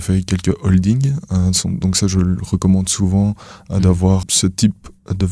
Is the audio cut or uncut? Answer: cut